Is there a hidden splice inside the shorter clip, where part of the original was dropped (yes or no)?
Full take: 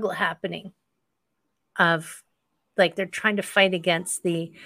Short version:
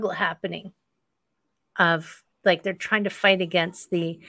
yes